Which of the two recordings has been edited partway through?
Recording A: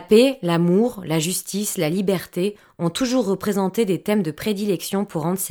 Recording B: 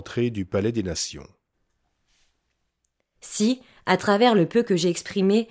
B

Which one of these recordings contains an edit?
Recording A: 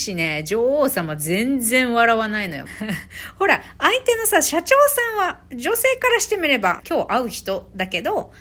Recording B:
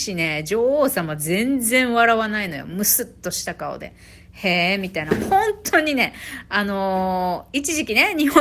A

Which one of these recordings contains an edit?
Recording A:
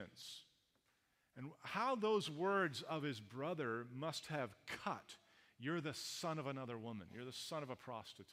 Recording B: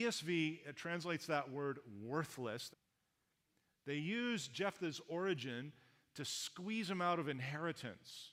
B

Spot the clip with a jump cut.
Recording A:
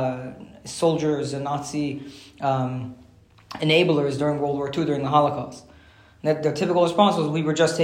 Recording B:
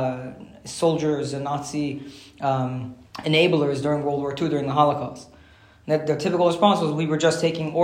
B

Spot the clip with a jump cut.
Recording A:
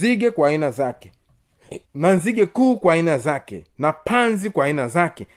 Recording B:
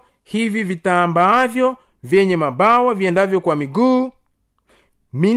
A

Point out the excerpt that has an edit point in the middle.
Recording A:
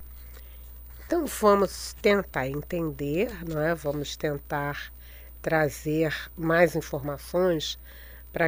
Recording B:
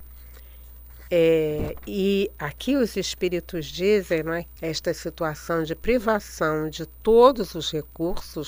B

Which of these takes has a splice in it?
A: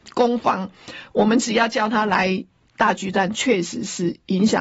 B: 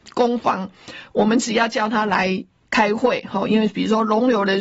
A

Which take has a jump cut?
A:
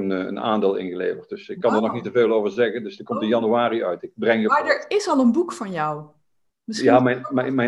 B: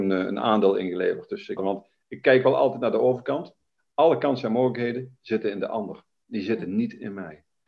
B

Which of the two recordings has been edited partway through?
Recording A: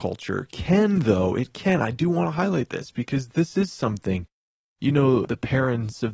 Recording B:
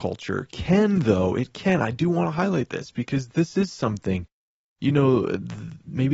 A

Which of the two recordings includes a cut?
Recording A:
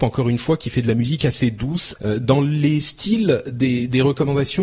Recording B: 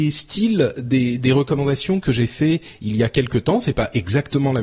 A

